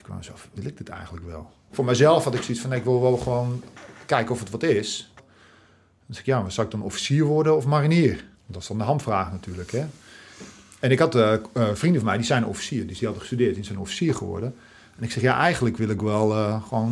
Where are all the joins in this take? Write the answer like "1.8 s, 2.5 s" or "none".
1.7 s, 5.2 s, 8.3 s